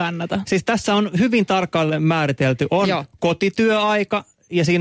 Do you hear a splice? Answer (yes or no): no